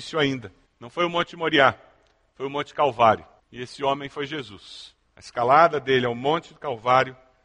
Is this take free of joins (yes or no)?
yes